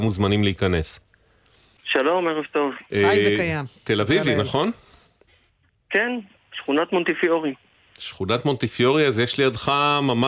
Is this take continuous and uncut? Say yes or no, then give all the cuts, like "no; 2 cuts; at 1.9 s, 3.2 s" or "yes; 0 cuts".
no; 1 cut; at 1.8 s